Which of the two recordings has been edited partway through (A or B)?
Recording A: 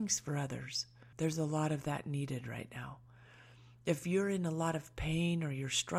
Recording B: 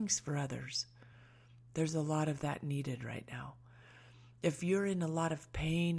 A